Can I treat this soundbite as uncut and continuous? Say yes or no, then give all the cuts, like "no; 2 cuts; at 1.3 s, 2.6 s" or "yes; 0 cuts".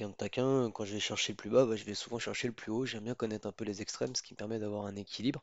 yes; 0 cuts